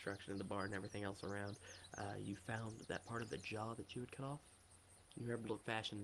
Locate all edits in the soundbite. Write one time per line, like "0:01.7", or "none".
none